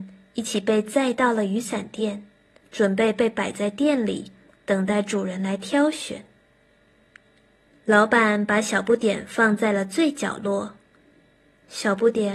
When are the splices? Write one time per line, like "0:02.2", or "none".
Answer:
0:07.7